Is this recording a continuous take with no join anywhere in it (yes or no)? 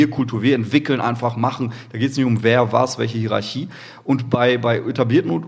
yes